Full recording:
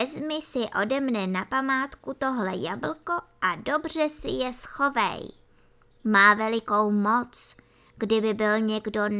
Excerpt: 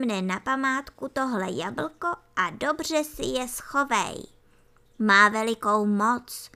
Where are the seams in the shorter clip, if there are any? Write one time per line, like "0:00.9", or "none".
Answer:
none